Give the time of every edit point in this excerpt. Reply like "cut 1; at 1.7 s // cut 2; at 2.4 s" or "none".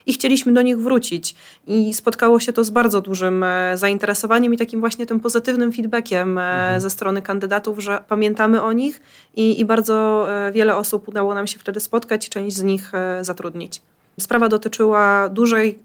cut 1; at 14.2 s